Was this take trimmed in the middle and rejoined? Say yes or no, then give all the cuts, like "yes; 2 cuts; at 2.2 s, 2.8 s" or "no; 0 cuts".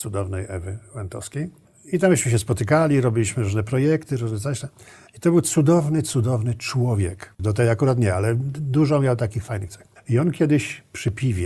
yes; 1 cut; at 7.4 s